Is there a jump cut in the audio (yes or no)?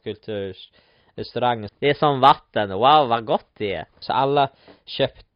yes